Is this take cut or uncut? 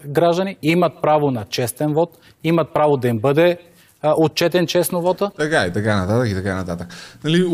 uncut